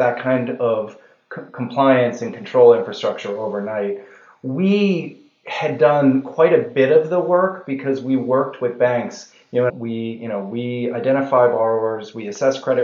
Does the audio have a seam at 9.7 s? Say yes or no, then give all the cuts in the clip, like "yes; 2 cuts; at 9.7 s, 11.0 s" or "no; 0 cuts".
yes; 1 cut; at 9.7 s